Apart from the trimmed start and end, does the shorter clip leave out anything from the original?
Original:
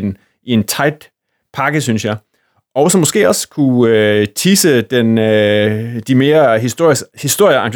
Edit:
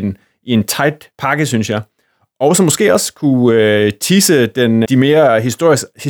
yes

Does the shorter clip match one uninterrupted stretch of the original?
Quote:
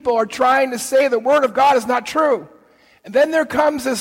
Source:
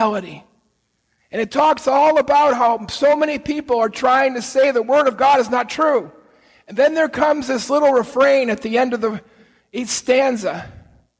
yes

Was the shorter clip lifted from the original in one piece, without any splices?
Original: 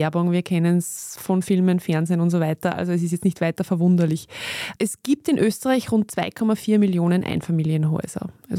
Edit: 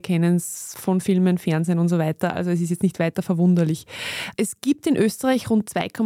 yes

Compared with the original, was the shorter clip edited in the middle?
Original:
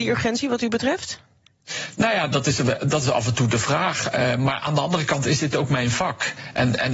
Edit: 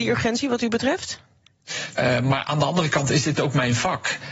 yes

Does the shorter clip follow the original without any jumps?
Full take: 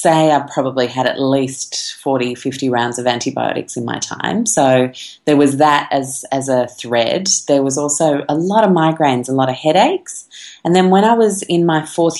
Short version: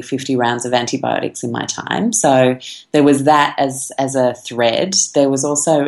yes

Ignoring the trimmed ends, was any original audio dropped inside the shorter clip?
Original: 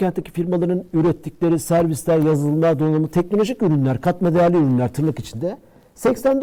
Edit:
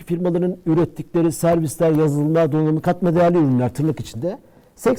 yes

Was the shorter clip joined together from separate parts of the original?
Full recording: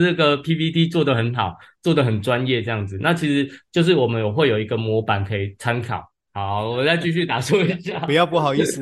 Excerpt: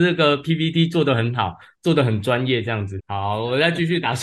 yes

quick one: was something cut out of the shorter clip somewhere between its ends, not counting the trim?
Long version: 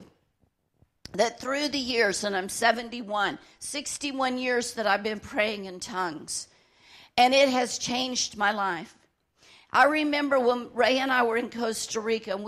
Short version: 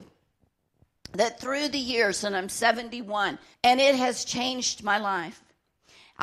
yes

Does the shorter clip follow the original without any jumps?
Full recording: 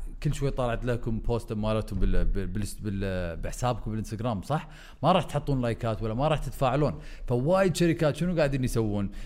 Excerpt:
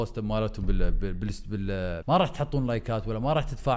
no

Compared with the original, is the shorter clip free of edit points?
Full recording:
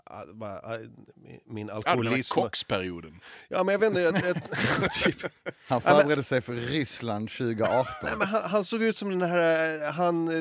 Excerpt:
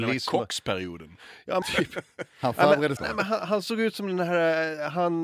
no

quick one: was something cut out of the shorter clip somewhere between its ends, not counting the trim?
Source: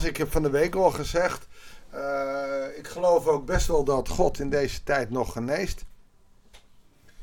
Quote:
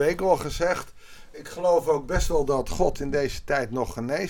yes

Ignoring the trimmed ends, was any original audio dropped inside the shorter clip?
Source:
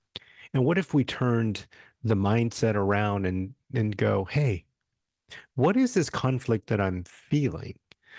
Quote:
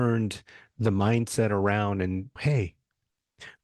yes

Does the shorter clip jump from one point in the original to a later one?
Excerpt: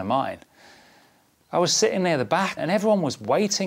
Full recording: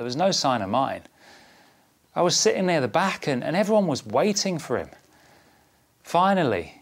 yes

